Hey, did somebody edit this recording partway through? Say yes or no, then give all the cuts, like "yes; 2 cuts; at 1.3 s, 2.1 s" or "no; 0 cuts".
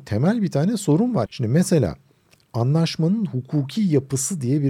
yes; 1 cut; at 1.3 s